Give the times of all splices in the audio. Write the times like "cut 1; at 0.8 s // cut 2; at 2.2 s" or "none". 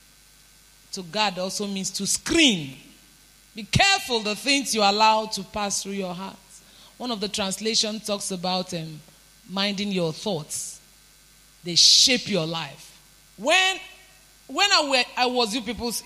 cut 1; at 13.3 s